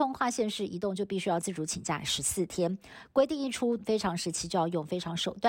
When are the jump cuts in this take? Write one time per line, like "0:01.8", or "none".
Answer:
0:03.8